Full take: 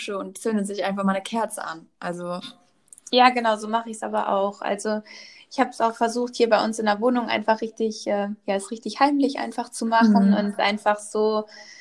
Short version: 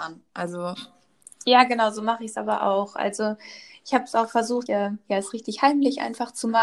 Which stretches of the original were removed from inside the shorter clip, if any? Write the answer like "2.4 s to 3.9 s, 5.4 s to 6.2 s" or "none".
6.3 s to 8.0 s